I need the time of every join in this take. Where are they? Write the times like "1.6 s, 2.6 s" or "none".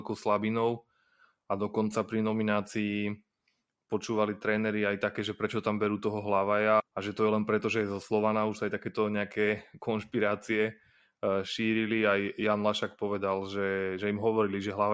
6.8 s